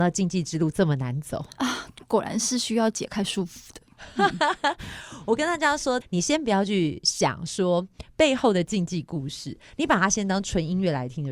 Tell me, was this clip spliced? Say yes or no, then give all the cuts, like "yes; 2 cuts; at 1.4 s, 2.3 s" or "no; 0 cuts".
yes; 1 cut; at 6.0 s